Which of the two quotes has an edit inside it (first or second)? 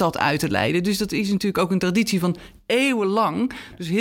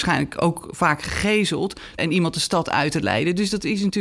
second